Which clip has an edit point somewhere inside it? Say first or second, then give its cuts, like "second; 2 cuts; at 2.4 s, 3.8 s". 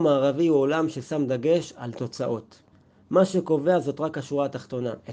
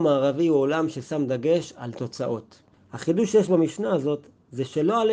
second; 1 cut; at 2.7 s